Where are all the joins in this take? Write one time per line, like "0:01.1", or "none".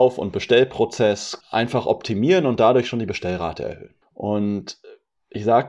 0:01.4
0:04.0